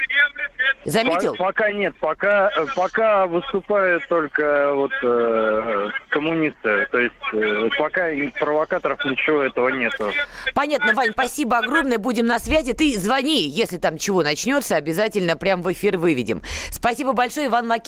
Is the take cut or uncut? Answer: uncut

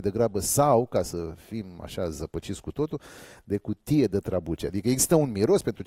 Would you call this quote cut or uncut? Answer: uncut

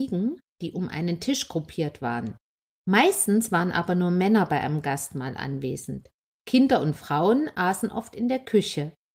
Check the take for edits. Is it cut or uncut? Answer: uncut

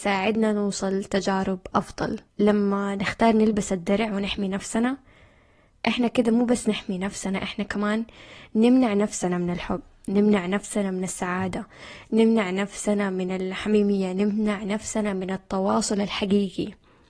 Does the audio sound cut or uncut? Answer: uncut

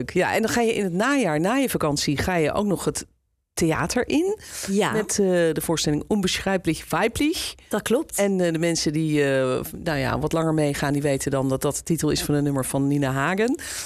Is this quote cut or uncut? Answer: uncut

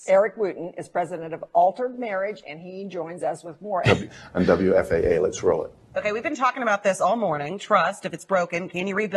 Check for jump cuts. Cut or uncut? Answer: cut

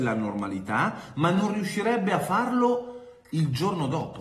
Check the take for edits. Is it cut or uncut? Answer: cut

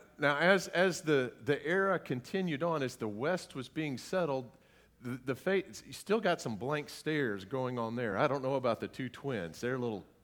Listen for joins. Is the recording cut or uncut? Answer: uncut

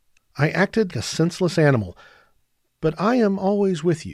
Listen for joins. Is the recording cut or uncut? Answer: cut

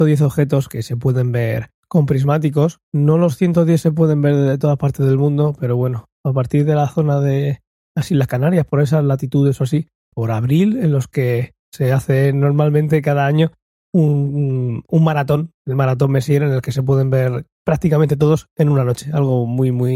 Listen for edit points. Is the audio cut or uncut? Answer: cut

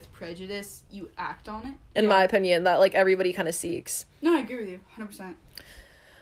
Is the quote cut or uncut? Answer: cut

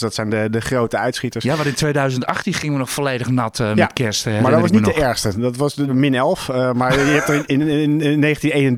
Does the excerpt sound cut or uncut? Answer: cut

